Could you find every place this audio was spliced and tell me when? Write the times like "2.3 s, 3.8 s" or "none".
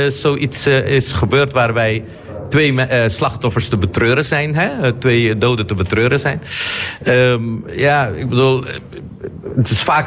none